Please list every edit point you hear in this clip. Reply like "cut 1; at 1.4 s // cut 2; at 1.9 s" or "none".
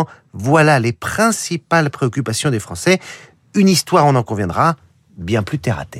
none